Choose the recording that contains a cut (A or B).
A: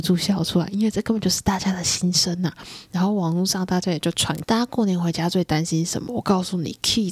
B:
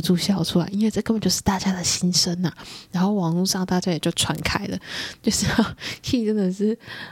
A